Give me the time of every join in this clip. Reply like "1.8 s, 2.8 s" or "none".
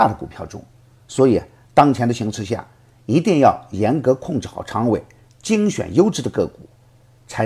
none